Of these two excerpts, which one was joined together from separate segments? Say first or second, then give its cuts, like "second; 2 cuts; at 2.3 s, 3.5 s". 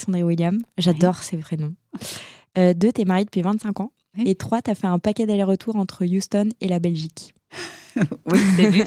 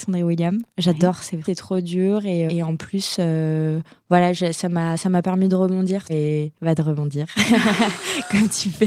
second; 3 cuts; at 1.4 s, 2.5 s, 6.1 s